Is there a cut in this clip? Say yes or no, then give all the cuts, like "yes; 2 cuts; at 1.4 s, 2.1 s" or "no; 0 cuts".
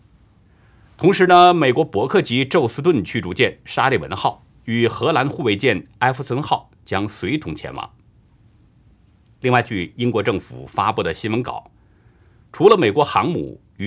no; 0 cuts